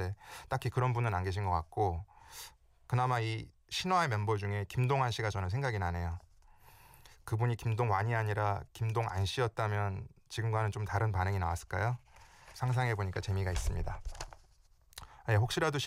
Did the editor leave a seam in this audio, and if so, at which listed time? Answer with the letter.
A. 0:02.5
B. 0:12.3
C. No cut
C